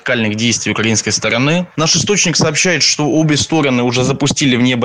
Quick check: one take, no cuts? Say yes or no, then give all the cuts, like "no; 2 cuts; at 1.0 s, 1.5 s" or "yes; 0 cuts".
no; 1 cut; at 1.7 s